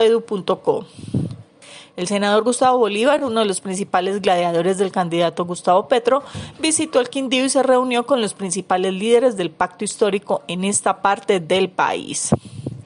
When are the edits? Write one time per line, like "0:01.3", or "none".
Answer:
none